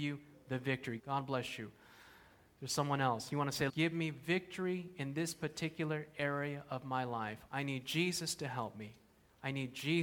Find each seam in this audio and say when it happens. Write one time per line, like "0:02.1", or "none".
0:01.0
0:03.7
0:07.5